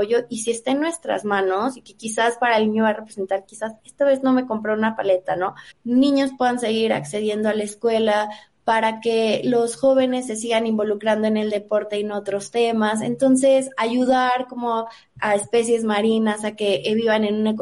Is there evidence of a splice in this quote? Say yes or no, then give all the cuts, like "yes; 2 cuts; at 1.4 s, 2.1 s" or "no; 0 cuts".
yes; 1 cut; at 5.7 s